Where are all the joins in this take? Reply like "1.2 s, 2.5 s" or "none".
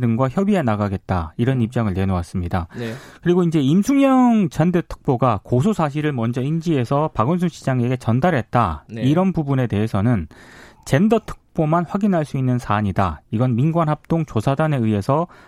none